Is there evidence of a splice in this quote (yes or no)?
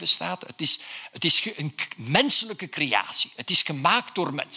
no